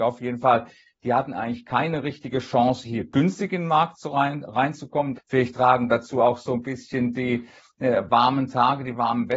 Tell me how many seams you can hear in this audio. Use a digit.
1